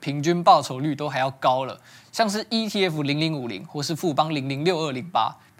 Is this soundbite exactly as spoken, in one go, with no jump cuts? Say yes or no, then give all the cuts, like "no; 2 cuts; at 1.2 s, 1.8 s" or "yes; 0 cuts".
yes; 0 cuts